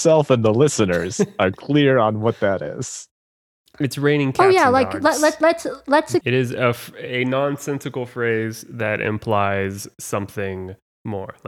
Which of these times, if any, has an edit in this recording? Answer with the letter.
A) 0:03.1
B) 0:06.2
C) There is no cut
B